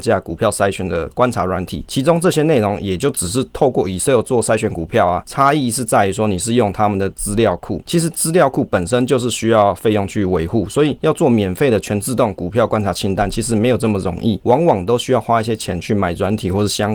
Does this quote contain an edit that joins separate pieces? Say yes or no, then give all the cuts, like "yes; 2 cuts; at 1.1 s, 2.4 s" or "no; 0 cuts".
no; 0 cuts